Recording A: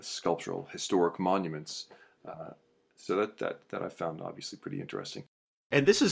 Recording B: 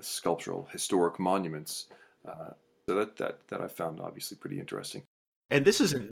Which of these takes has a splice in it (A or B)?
B